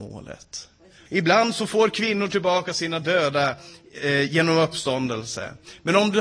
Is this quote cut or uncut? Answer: cut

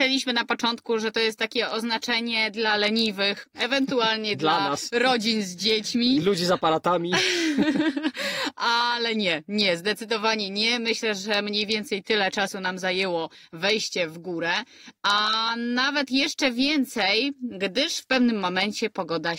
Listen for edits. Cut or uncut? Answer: uncut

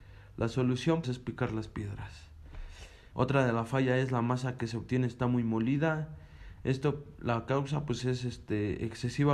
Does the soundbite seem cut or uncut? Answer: cut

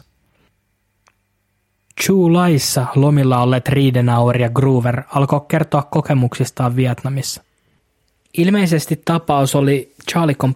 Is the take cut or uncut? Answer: uncut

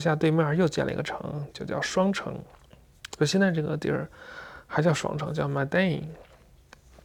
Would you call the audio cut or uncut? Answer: uncut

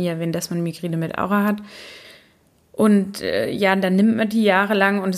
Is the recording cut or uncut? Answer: uncut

